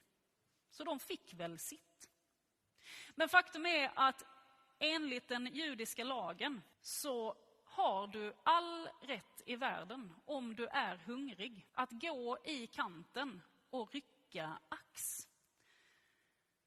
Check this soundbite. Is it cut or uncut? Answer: cut